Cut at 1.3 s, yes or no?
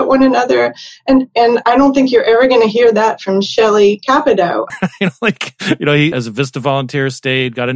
no